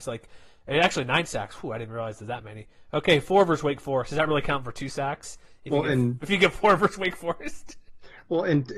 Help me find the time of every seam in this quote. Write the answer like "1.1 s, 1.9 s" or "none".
none